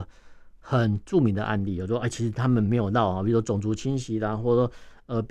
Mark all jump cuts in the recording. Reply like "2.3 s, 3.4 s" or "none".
none